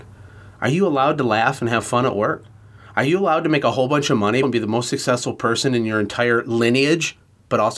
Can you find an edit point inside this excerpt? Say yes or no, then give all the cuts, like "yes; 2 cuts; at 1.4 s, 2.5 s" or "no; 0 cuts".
yes; 1 cut; at 4.4 s